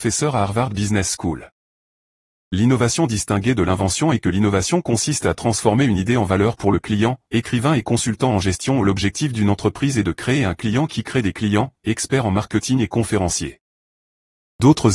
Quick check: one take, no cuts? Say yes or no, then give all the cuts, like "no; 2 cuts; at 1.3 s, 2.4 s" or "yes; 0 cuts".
no; 2 cuts; at 7.3 s, 11.7 s